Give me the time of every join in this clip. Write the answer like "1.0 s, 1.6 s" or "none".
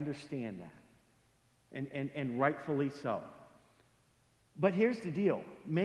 none